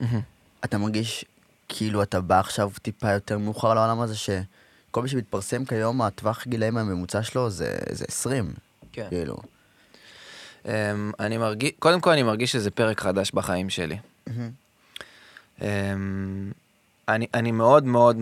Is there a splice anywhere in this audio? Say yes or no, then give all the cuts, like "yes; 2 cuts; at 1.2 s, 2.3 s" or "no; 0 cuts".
no; 0 cuts